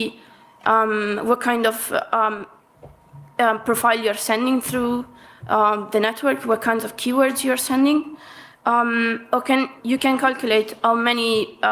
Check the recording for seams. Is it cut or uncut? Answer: cut